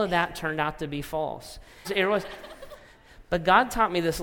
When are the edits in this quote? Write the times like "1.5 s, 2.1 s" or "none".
1.8 s